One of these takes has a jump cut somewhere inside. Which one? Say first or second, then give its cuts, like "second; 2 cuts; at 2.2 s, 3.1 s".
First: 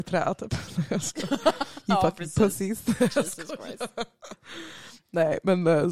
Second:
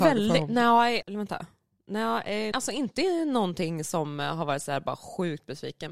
second; 2 cuts; at 1.0 s, 2.5 s